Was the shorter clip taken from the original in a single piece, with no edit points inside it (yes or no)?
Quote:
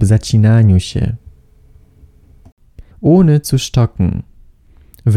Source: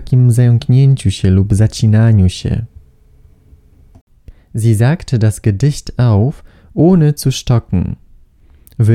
no